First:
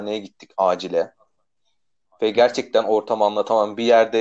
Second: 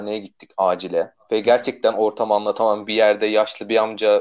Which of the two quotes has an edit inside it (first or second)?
second